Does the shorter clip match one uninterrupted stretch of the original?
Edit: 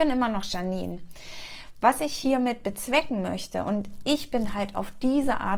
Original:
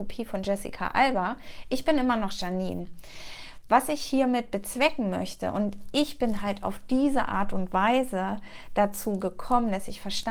yes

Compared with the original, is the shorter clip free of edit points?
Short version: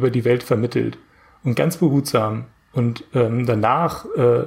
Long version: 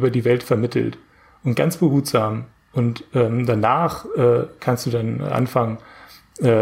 yes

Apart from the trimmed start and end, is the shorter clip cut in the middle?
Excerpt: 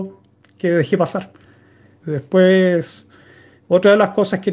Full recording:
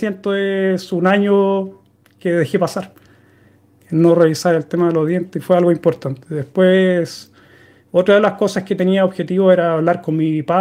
yes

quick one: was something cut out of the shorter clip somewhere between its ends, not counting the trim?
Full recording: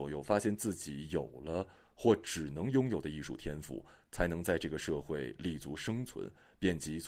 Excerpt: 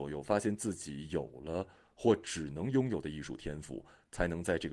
no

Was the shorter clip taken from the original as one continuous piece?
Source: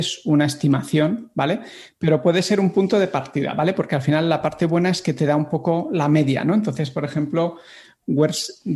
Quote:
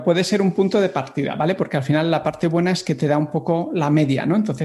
yes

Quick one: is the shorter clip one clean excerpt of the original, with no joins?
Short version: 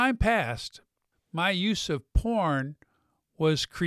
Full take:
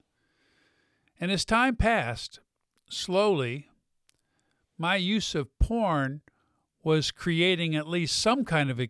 no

